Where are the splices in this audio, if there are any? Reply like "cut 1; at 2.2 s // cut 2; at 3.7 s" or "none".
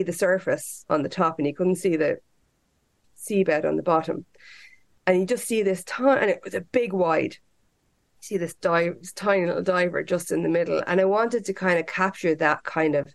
none

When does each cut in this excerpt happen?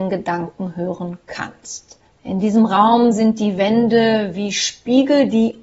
none

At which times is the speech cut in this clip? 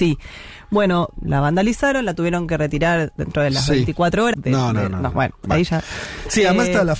cut 1; at 1.1 s // cut 2; at 4.3 s

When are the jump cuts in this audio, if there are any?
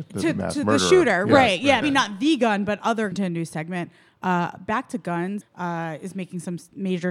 cut 1; at 1.8 s // cut 2; at 3.1 s // cut 3; at 5.4 s

